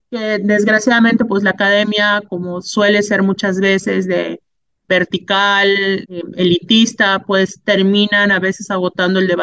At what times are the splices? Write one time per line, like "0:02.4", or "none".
0:06.0